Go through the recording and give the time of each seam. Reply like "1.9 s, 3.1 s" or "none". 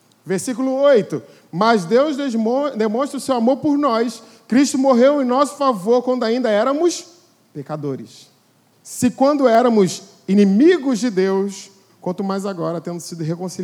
8.7 s, 11.9 s